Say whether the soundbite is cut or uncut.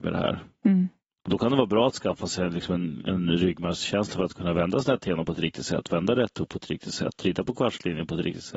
uncut